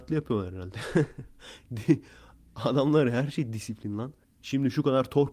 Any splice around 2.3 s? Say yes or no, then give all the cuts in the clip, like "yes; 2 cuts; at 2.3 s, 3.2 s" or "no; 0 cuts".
no; 1 cut; at 4.2 s